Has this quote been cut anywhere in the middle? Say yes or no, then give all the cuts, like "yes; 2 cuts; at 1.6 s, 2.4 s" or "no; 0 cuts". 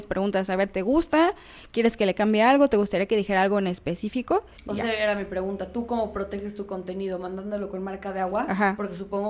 yes; 1 cut; at 4.5 s